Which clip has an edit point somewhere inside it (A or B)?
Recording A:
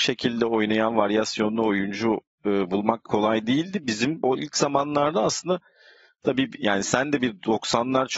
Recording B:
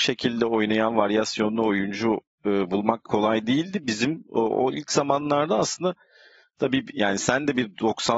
A